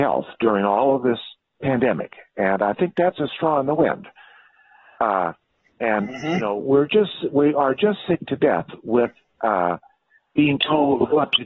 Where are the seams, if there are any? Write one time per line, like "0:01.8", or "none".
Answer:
none